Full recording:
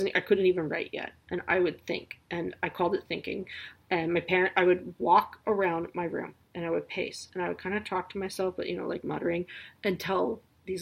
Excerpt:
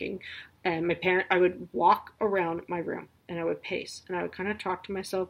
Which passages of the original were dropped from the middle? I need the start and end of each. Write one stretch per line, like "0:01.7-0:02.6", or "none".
none